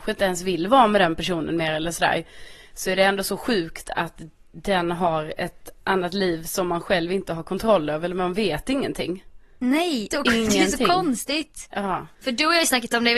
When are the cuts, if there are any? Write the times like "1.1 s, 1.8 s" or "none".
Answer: 10.1 s